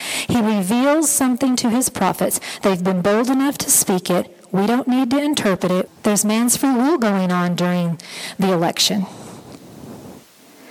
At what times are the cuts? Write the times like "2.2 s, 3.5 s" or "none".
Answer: 5.9 s